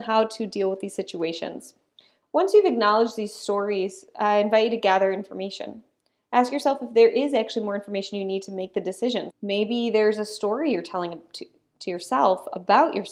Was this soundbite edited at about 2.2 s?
yes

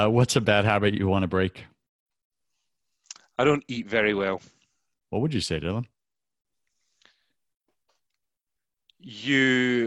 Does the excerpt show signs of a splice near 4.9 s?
yes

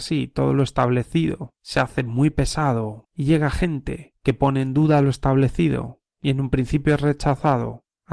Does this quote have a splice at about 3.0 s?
yes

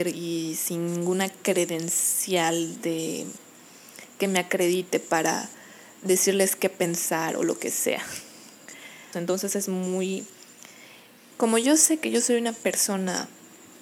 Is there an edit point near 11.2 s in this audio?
yes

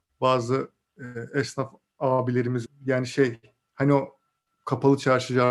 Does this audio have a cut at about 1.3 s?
no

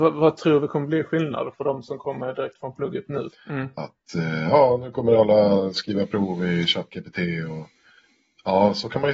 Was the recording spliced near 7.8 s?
no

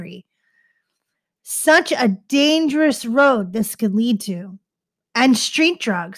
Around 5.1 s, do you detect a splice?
no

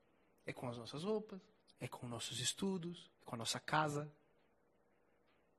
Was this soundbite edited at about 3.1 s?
yes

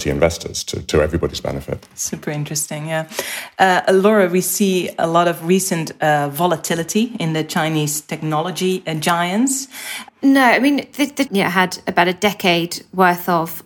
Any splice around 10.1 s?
yes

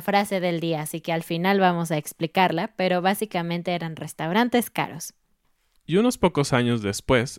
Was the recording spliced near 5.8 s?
yes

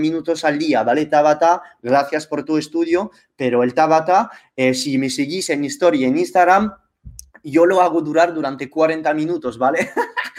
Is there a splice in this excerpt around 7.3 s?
no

